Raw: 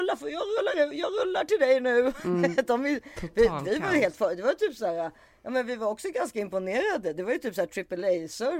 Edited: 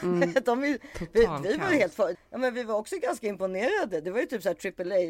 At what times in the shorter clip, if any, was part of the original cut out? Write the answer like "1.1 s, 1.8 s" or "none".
2.1 s